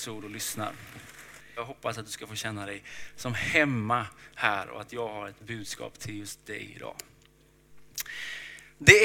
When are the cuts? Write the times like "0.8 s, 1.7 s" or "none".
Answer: 1.6 s